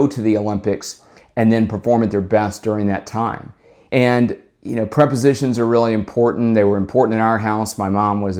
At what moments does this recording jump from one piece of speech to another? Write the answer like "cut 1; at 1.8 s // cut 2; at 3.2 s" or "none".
cut 1; at 3.9 s